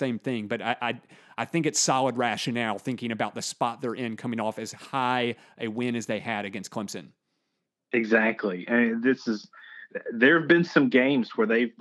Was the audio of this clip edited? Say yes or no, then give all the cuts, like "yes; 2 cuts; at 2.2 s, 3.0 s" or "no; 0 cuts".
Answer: no; 0 cuts